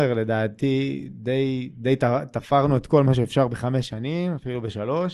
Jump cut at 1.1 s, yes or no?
no